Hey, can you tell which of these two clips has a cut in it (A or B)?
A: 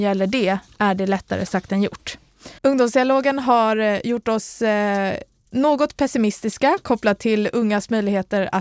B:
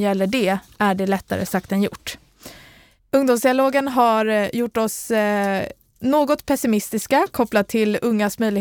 A